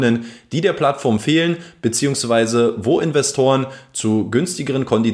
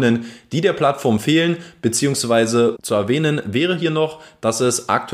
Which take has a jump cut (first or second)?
second